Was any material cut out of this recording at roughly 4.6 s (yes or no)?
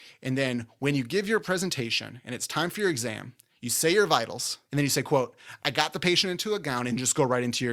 yes